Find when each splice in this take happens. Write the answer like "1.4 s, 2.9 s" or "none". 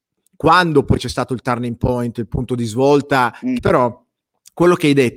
3.6 s